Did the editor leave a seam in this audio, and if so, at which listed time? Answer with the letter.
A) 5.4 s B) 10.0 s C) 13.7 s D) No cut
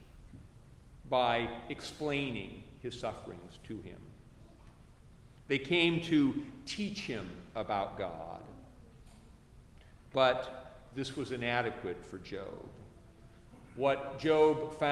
D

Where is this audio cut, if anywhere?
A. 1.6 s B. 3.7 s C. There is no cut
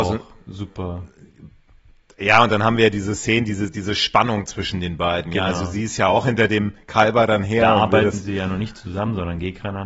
B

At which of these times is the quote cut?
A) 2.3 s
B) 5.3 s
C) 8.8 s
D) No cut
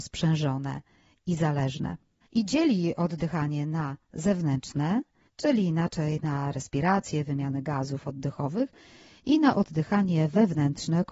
A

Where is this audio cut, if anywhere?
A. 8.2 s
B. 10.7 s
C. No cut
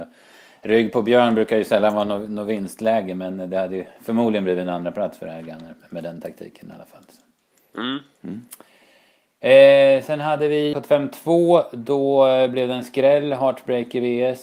B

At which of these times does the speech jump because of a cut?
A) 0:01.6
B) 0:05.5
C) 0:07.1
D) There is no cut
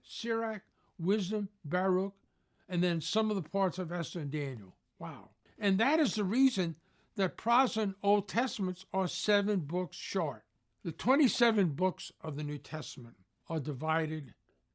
D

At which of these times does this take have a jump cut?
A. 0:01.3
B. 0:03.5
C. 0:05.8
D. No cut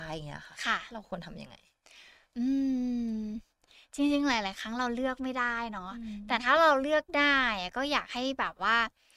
D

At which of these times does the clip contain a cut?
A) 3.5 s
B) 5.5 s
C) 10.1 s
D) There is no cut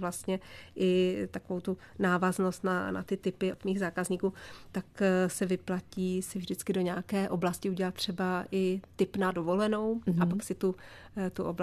A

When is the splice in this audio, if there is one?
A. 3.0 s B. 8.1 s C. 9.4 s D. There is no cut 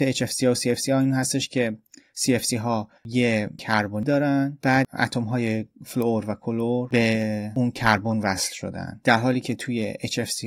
A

